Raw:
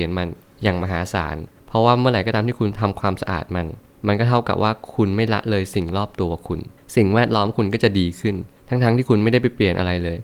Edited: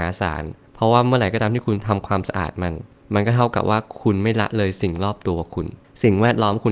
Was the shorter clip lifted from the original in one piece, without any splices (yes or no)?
yes